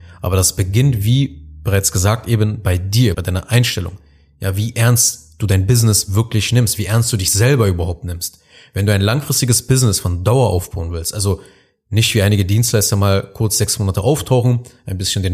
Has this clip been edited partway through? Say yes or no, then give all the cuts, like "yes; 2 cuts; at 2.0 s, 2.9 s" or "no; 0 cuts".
yes; 1 cut; at 3.1 s